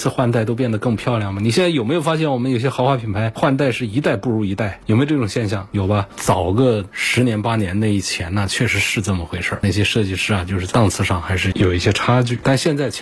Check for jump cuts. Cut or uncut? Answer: cut